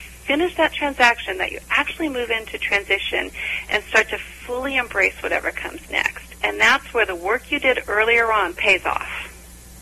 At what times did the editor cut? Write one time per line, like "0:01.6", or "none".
0:08.5